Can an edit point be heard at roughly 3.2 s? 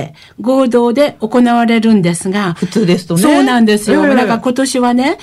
no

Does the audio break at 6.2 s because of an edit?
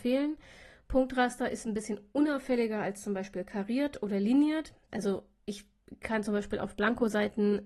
no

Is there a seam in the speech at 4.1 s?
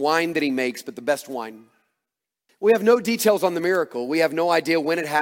no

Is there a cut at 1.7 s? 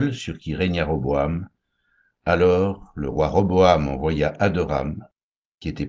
no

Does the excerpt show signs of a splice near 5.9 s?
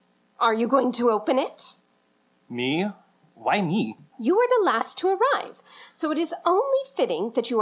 no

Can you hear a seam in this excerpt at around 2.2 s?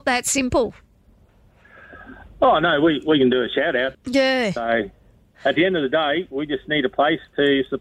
no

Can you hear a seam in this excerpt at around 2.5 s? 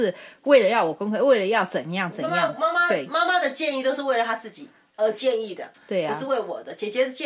no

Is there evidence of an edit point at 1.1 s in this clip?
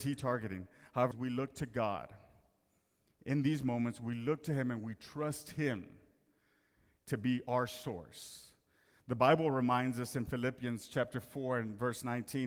yes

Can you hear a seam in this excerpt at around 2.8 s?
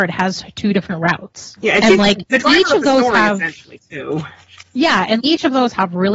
no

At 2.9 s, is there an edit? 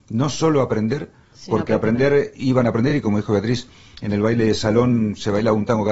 no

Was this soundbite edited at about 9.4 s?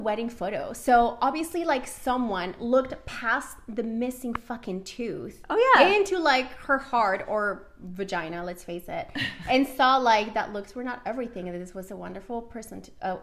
no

